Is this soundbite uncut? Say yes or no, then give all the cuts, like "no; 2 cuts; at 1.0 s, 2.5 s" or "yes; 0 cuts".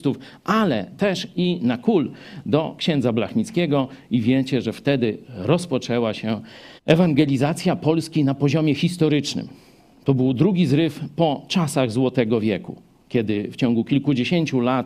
no; 1 cut; at 6.8 s